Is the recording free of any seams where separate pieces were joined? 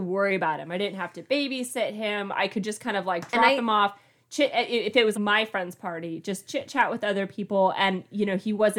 no; 1 cut; at 5.1 s

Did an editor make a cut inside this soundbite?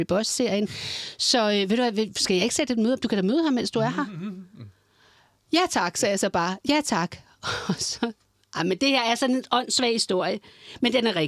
no; 0 cuts

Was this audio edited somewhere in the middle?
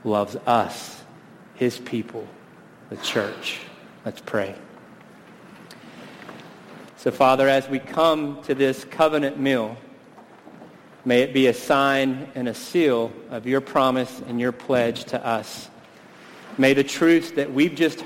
yes; 1 cut; at 6.9 s

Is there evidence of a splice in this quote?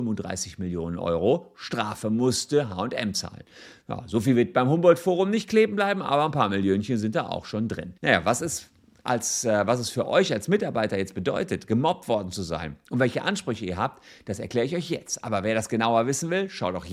yes; 1 cut; at 8.0 s

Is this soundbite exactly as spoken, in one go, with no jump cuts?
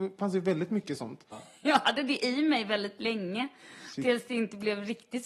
no; 1 cut; at 1.3 s

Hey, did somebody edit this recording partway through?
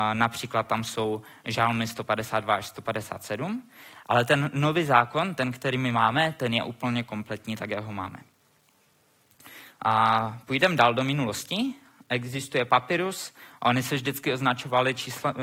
no; 0 cuts

